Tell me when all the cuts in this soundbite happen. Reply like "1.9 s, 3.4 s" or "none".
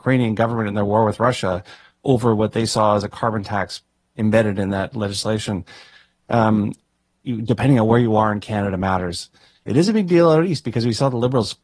7.2 s, 9.6 s